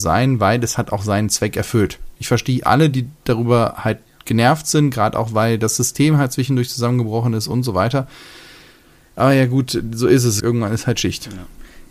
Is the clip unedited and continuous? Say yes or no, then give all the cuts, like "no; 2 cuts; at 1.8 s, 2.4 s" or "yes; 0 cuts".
no; 1 cut; at 10.4 s